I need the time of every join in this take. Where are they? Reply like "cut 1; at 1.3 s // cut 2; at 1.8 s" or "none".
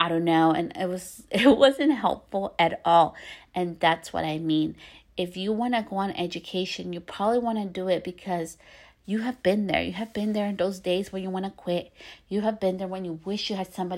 none